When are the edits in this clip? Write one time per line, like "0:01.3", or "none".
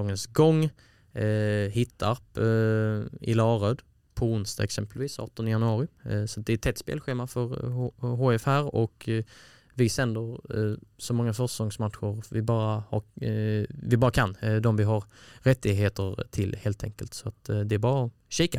none

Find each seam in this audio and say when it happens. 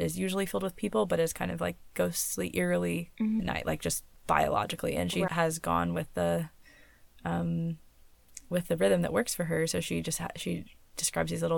0:03.4
0:05.3

